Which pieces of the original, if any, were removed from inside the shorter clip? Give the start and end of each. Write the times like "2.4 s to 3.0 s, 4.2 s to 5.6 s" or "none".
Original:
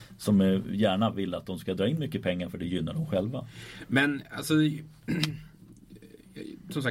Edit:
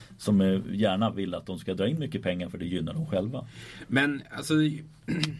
none